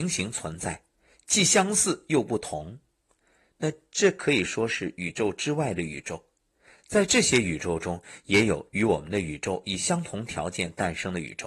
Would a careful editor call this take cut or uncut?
uncut